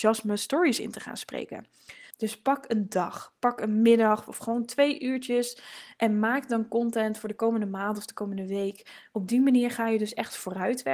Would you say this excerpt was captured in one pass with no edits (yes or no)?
no